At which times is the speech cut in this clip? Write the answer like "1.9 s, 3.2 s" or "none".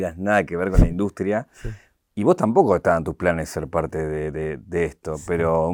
none